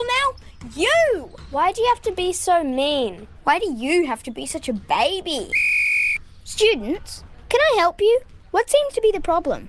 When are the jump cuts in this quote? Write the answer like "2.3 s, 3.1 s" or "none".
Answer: none